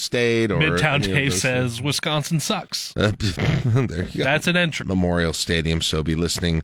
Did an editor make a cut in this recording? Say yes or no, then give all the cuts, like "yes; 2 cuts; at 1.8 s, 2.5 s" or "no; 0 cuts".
yes; 1 cut; at 4.8 s